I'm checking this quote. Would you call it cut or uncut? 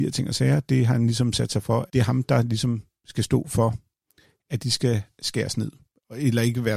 cut